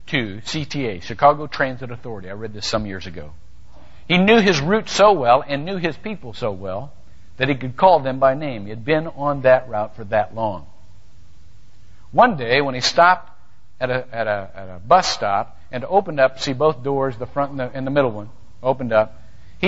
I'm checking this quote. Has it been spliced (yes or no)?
no